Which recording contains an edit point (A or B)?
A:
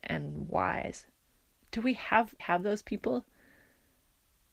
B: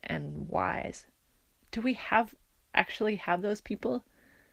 A